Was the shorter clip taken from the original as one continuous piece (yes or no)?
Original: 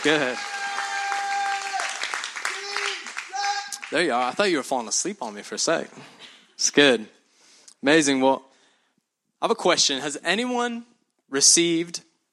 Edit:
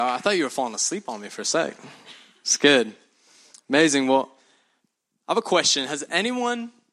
yes